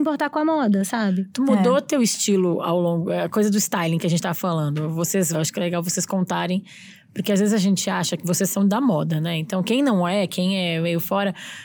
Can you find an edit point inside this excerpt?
yes; 1 cut; at 5.3 s

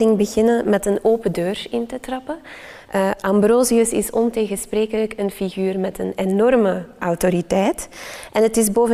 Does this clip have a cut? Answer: no; 0 cuts

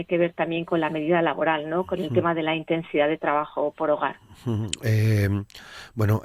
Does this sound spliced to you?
no; 0 cuts

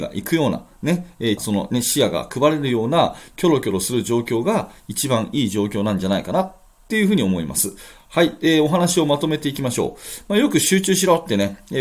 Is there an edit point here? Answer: yes; 1 cut; at 1.4 s

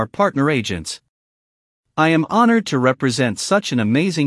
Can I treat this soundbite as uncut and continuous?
yes; 0 cuts

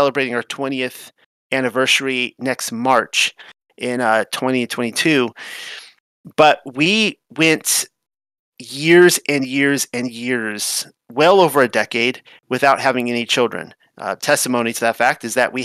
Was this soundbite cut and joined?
no; 0 cuts

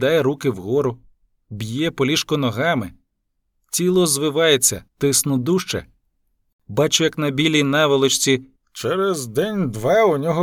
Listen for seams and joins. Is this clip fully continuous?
no; 2 cuts; at 4.9 s, 8.5 s

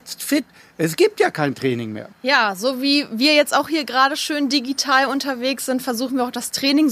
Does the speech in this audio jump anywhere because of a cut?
yes; 1 cut; at 2.1 s

